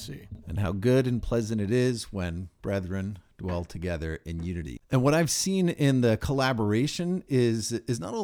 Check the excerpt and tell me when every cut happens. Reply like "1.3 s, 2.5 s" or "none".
none